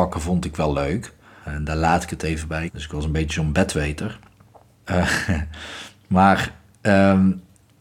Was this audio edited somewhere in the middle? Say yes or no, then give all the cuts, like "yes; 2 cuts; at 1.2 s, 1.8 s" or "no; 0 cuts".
yes; 3 cuts; at 1.4 s, 2.7 s, 4.7 s